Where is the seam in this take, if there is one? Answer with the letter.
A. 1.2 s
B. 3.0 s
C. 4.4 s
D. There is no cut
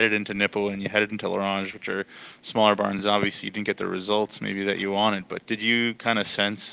D